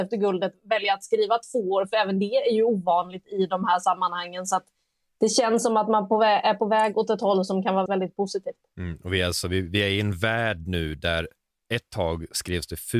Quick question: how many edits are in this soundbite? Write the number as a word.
one